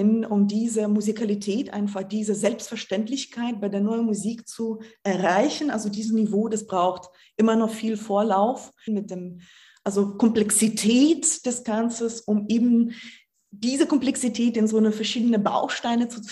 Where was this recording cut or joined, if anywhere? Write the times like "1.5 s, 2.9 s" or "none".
8.9 s